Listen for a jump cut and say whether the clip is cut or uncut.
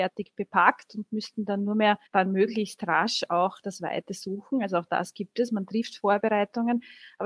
cut